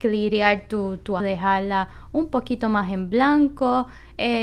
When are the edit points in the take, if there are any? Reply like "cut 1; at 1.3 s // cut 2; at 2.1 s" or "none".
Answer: cut 1; at 1.2 s